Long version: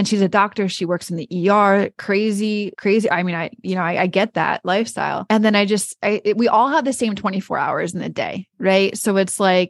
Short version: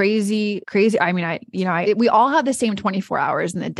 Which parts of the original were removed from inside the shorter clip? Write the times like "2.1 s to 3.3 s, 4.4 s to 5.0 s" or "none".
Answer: 3.9 s to 6.2 s